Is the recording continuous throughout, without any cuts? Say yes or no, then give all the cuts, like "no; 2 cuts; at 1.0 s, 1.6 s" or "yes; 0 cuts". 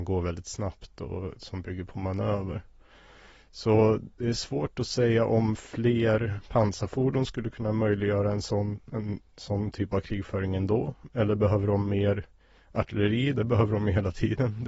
yes; 0 cuts